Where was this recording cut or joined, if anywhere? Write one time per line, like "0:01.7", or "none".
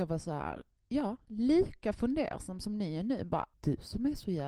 0:03.5